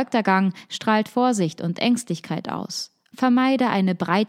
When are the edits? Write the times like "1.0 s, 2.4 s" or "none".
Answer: 3.1 s